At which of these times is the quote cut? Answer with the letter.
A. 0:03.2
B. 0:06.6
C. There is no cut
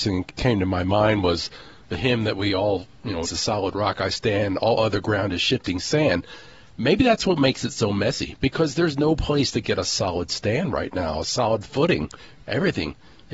A